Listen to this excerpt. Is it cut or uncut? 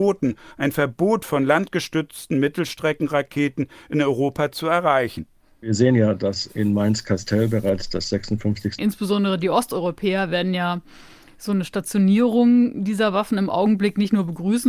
cut